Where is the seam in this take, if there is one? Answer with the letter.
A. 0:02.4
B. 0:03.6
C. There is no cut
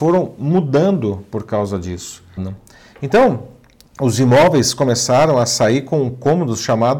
A